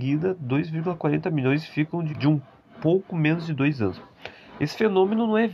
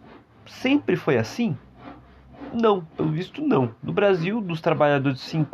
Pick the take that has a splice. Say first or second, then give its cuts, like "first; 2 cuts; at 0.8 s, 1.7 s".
first; 1 cut; at 2.1 s